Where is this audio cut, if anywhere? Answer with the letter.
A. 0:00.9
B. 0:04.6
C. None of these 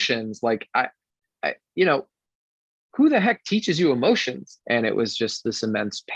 B